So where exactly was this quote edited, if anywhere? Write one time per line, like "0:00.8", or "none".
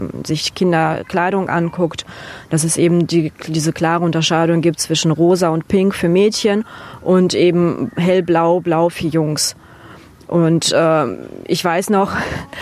none